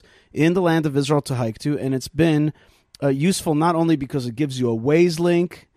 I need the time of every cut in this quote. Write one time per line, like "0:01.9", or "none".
none